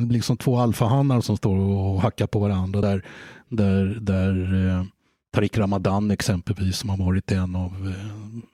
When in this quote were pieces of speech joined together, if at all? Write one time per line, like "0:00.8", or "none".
none